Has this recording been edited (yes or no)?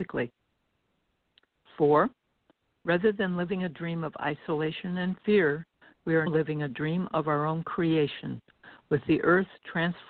yes